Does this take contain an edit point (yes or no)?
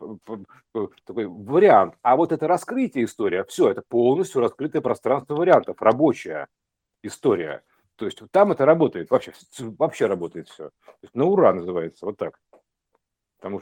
no